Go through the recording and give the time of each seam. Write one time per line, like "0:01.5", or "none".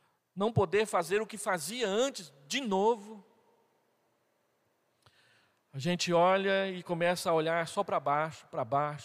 none